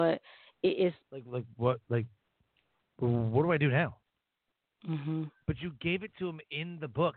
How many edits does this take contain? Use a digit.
1